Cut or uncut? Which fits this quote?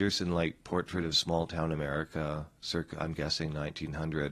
uncut